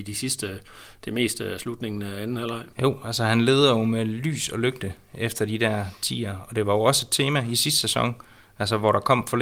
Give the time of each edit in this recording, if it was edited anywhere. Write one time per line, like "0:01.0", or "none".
0:02.7

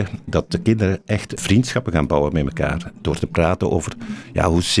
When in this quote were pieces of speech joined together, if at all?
0:01.4

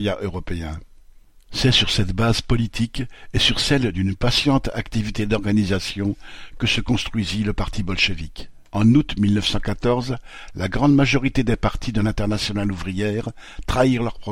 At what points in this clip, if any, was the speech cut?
0:08.7

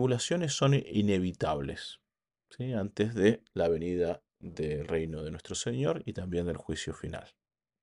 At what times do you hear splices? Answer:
0:04.3

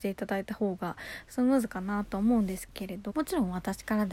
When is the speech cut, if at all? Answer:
0:03.1

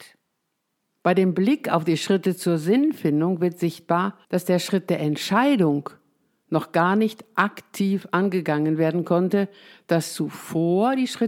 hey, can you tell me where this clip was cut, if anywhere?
0:01.0
0:04.2

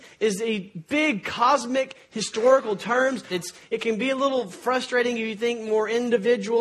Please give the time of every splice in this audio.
0:03.3

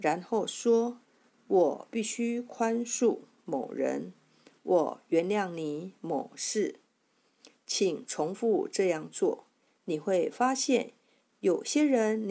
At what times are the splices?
none

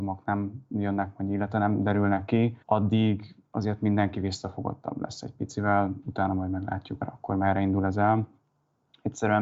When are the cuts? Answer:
0:02.6
0:07.0

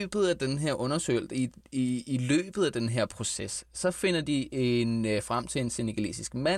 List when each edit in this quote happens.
none

